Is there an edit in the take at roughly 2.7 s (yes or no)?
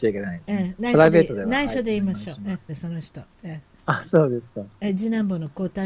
yes